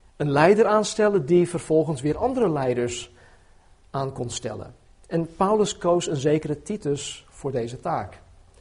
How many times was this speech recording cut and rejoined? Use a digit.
0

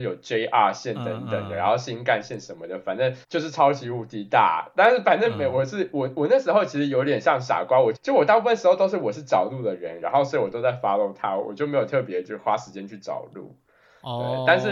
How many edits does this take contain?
3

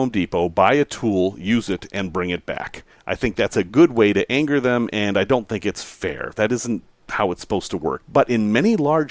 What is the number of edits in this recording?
1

